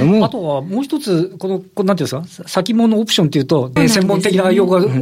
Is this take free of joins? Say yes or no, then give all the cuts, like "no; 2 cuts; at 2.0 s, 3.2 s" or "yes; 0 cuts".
no; 1 cut; at 3.8 s